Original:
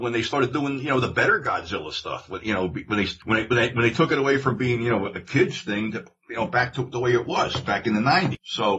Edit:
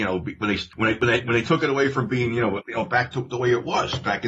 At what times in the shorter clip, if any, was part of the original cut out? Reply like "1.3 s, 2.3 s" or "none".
2.6 s